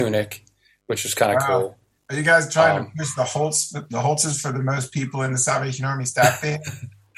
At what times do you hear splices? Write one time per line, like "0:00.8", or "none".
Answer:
none